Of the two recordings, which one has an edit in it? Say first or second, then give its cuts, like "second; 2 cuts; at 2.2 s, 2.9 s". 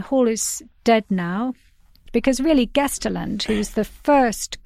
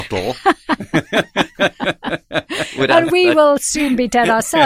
first; 1 cut; at 2.1 s